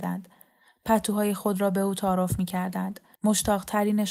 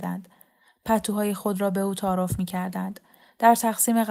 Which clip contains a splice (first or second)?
first